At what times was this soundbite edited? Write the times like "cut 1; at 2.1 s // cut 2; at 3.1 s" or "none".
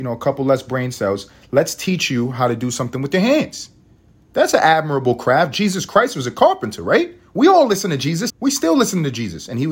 cut 1; at 8.3 s